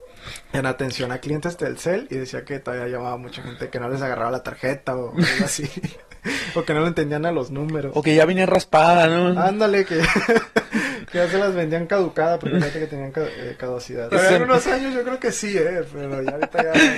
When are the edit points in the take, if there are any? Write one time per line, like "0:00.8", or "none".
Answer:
0:14.1